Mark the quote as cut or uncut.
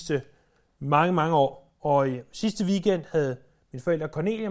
uncut